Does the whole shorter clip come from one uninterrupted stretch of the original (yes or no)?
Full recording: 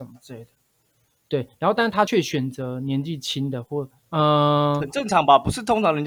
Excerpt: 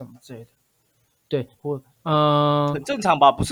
no